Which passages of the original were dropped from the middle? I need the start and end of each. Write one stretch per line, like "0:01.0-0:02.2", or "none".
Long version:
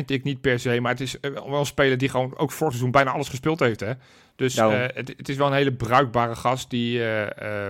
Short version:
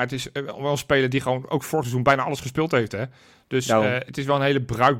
0:04.9-0:05.2

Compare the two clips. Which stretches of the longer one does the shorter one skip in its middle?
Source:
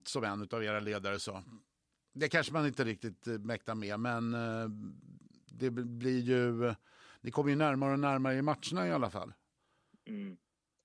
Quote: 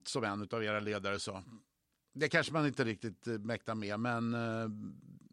none

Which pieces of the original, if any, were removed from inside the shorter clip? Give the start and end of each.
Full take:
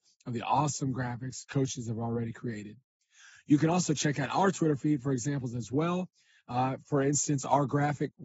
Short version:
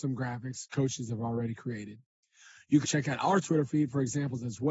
0:03.6-0:03.9

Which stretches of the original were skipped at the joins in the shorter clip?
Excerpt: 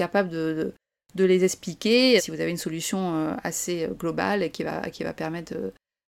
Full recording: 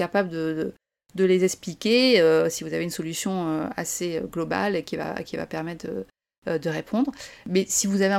0:02.2-0:02.5

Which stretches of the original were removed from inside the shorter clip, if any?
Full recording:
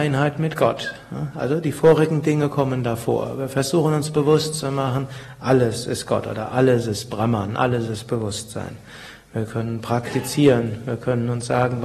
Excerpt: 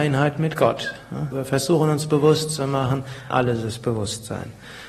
0:01.3-0:03.4
0:05.3-0:07.6

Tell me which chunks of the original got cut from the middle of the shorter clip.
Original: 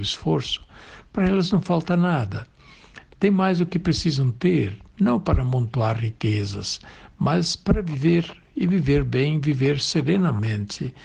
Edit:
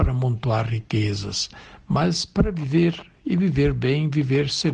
none

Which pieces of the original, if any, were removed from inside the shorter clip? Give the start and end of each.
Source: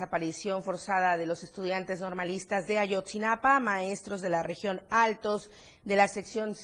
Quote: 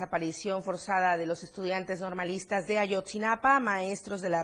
none

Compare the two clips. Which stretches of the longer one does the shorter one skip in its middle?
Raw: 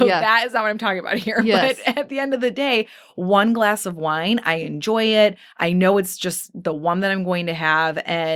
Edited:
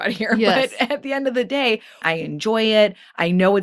0:03.1-0:04.4

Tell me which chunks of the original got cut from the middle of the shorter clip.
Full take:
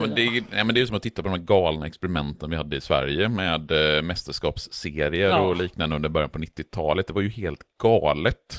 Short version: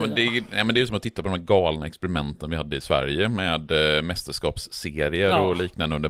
none

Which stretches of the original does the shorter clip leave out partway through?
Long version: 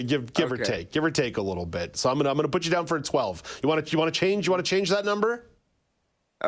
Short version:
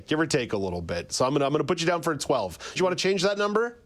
0:03.6-0:04.4

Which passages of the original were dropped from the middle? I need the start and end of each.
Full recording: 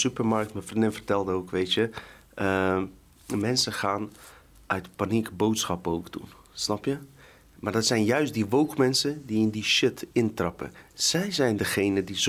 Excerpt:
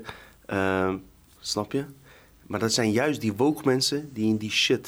0:03.2-0:06.5

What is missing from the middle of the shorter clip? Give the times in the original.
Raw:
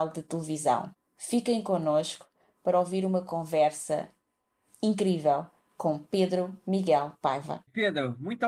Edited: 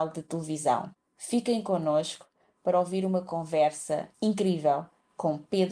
0:04.1-0:04.7

